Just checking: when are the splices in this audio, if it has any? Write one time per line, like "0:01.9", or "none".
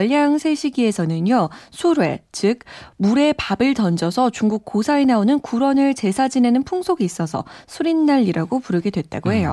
none

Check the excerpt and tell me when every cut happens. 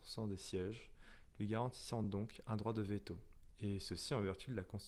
none

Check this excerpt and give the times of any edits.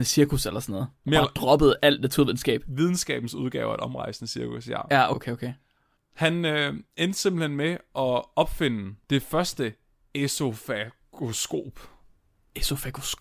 0:05.1
0:09.0

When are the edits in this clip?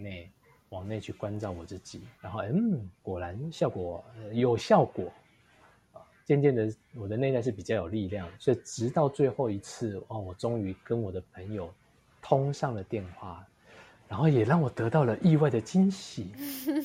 0:02.2
0:08.3

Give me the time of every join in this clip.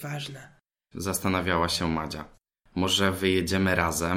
0:00.9

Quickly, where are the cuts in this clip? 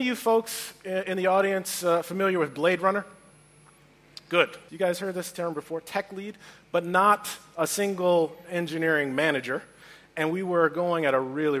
0:04.7

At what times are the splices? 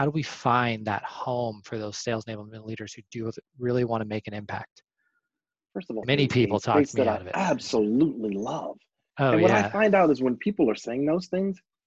0:06.0

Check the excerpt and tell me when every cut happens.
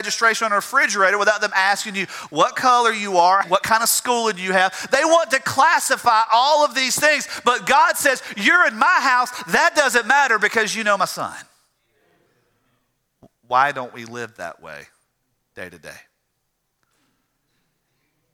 0:03.4

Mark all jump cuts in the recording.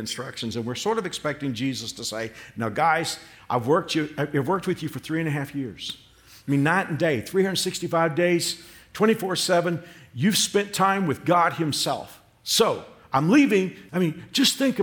0:13.9

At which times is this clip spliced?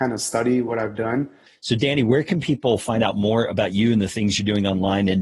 0:01.5

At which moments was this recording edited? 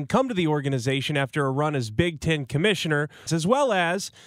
0:03.3

